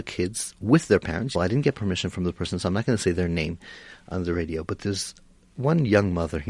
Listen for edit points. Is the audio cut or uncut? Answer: cut